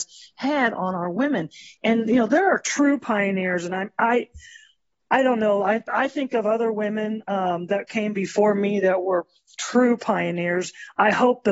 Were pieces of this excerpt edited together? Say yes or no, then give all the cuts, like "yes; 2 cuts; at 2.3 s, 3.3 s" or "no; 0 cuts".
no; 0 cuts